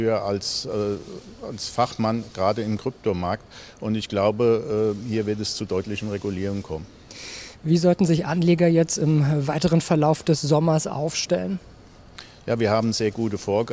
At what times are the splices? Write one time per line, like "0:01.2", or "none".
none

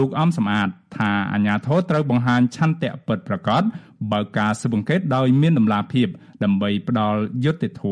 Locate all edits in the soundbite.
none

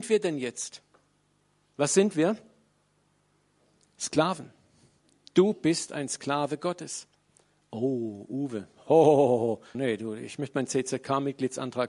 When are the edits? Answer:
0:09.7

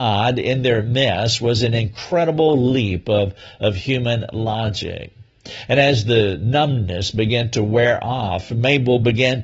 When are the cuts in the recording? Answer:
none

